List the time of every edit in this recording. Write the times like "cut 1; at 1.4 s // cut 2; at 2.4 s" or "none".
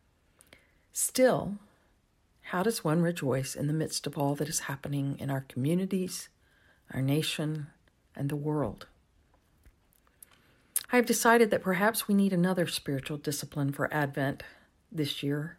cut 1; at 10.8 s

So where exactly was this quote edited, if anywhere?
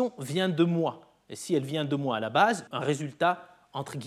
cut 1; at 2.7 s

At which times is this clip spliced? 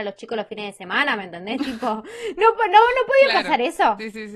none

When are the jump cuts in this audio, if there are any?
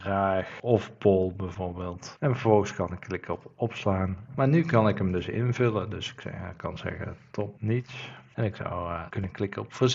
cut 1; at 4.3 s

